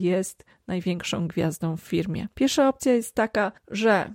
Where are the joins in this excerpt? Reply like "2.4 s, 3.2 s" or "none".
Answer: 2.3 s